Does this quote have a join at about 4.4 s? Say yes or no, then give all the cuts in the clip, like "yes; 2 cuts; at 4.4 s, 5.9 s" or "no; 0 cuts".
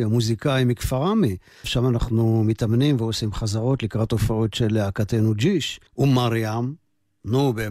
no; 2 cuts; at 1.6 s, 5.9 s